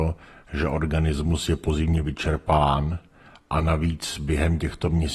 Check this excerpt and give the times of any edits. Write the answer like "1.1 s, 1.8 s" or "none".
none